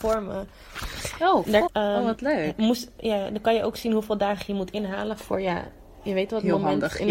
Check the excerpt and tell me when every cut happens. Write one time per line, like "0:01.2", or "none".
0:01.7

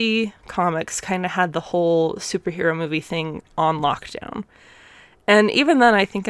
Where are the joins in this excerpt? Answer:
none

